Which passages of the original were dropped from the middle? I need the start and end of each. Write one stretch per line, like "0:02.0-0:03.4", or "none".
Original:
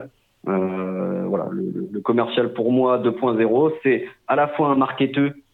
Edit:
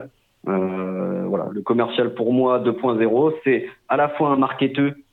0:01.5-0:01.9